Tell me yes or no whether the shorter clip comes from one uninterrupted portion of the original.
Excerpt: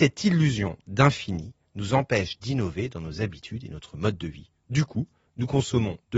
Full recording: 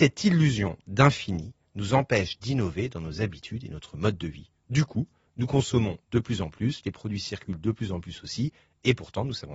yes